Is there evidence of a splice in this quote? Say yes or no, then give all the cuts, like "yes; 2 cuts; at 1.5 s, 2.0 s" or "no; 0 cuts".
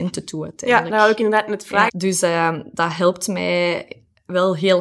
yes; 1 cut; at 1.9 s